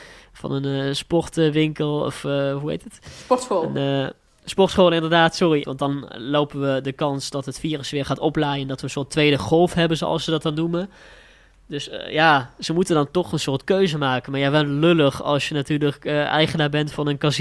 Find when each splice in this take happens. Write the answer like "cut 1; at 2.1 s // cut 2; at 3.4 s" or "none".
cut 1; at 5.6 s